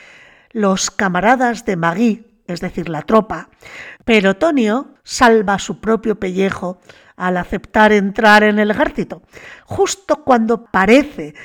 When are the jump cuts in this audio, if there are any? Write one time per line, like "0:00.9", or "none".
0:04.0